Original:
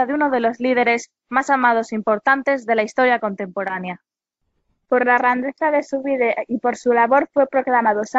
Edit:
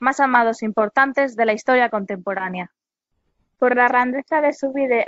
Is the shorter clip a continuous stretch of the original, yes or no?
yes